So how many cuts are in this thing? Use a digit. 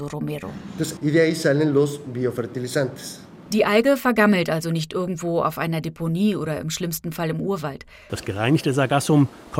2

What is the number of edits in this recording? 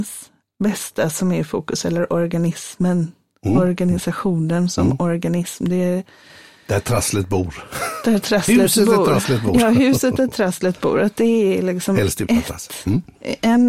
0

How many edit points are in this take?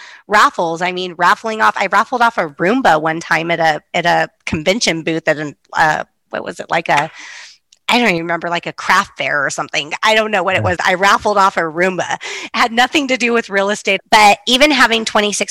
2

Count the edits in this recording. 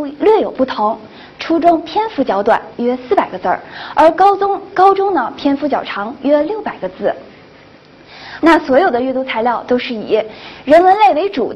1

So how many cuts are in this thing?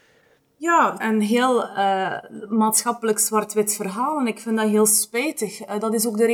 1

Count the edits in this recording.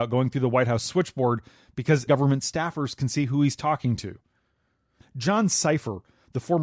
2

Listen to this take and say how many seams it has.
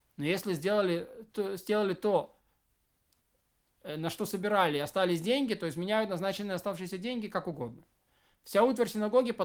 0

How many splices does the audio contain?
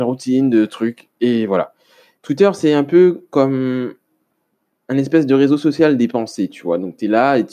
1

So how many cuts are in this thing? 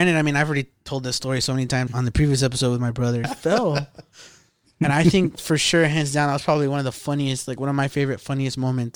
2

